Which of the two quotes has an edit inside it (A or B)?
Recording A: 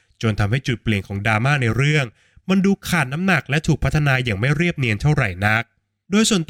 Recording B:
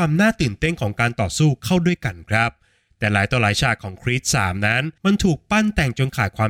B